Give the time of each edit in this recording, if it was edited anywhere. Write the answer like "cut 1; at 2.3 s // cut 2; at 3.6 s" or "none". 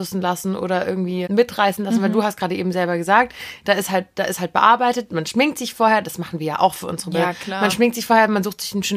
cut 1; at 1.3 s